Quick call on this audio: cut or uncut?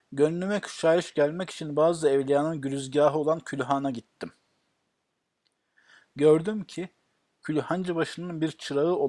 uncut